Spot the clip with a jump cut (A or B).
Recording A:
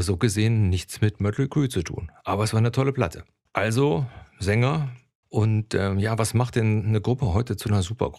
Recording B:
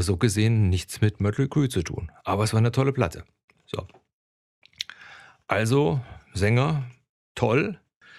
A